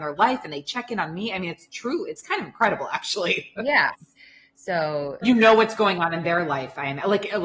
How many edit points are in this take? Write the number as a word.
two